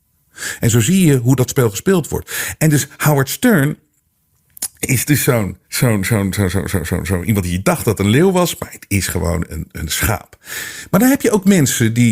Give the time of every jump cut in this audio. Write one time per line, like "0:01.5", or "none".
0:05.6